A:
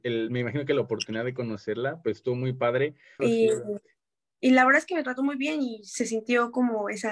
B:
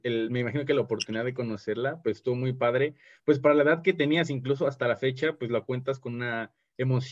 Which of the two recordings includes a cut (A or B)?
A